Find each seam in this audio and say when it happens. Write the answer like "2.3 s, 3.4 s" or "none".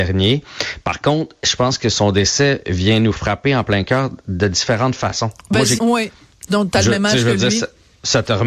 5.8 s